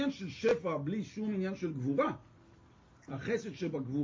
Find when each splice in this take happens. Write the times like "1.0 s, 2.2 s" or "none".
2.9 s